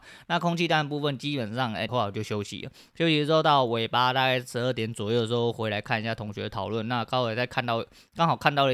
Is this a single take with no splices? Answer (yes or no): no